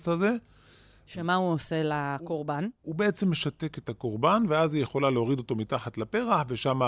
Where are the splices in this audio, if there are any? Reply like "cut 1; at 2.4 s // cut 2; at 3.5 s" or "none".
none